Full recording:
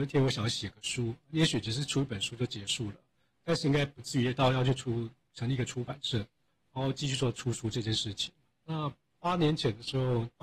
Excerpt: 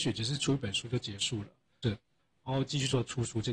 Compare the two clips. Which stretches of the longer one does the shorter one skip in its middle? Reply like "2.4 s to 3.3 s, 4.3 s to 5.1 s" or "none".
3.3 s to 6.1 s